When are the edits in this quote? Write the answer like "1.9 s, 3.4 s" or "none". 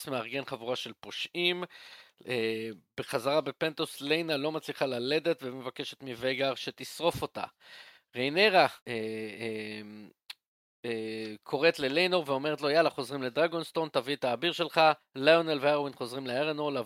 8.8 s